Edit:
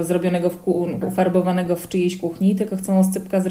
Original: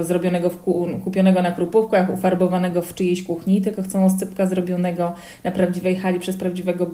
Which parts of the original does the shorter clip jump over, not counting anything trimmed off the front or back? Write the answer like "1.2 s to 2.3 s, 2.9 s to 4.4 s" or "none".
1.0 s to 2.1 s